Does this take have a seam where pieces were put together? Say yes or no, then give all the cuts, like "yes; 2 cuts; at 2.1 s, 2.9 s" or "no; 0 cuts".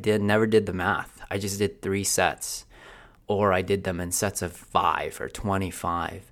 no; 0 cuts